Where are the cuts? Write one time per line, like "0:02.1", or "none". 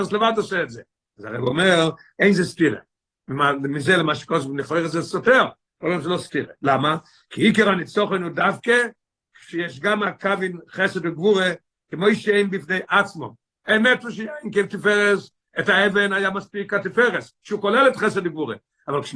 none